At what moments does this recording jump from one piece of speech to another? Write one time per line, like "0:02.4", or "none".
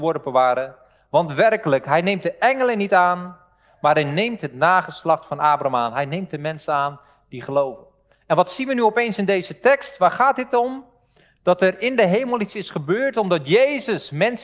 none

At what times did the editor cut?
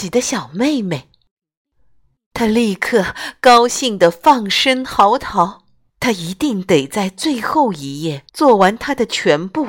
0:05.9
0:08.3

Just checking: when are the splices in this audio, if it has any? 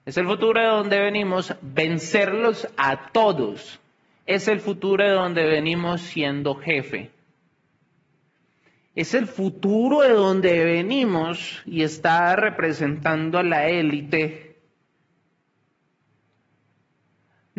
none

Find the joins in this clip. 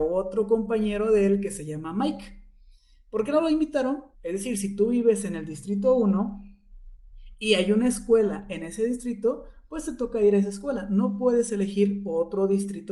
0:04.1

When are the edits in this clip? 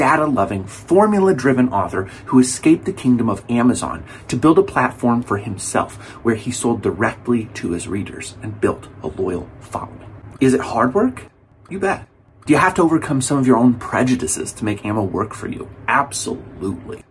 0:10.3

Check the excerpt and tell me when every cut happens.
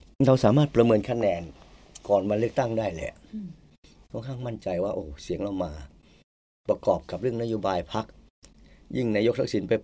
none

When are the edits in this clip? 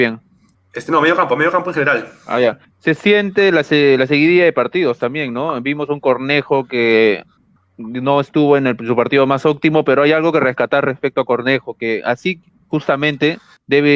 none

